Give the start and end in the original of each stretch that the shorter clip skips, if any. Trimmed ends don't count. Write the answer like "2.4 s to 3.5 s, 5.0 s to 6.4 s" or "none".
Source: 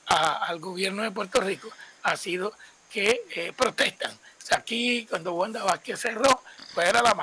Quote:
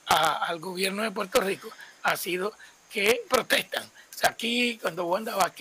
3.3 s to 3.6 s